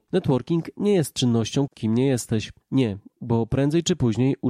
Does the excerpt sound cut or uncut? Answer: cut